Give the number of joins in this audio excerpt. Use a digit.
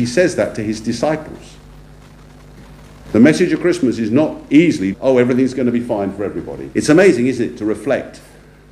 3